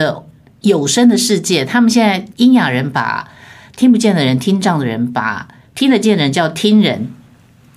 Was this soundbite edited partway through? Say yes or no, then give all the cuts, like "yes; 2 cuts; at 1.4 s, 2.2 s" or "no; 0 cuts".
yes; 1 cut; at 2.3 s